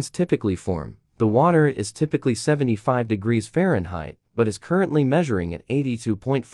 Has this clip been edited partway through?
no; 0 cuts

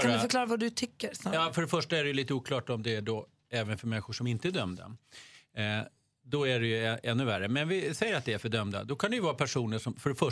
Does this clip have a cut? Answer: no; 0 cuts

